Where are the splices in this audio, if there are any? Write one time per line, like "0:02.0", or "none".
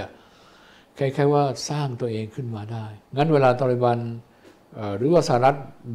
0:03.1